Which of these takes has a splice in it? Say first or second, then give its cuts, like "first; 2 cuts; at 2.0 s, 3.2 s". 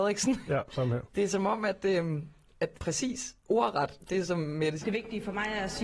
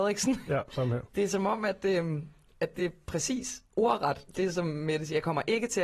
first; 2 cuts; at 2.8 s, 4.8 s